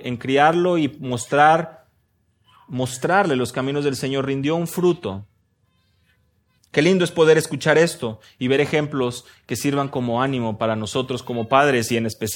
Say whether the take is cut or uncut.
cut